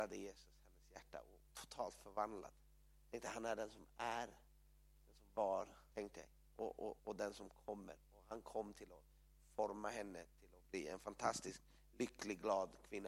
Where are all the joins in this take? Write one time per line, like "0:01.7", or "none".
0:01.5
0:05.9
0:07.0